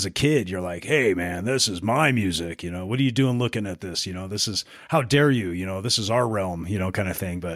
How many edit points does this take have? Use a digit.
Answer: 0